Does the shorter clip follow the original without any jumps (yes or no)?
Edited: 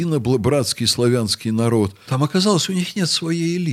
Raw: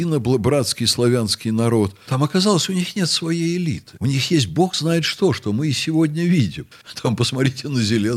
yes